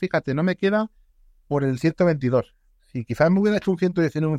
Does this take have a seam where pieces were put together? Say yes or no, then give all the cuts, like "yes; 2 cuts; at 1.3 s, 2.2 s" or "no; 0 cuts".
no; 0 cuts